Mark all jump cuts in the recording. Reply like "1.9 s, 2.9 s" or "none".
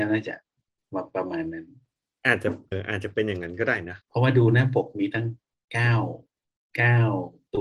2.7 s, 4.0 s